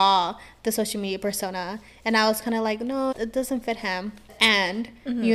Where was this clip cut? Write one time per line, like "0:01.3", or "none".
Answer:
0:03.1
0:04.3